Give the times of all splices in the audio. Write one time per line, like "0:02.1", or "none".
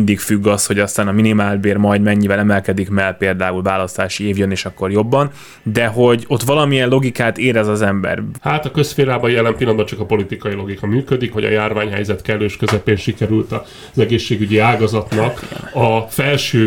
0:08.4
0:11.3